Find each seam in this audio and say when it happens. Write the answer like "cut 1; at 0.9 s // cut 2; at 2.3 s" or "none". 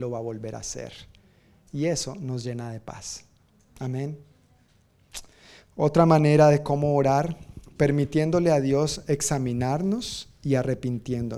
none